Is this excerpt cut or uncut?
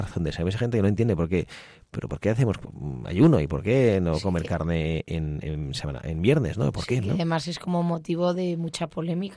uncut